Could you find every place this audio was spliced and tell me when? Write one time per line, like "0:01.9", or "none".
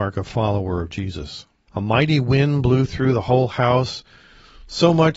0:01.7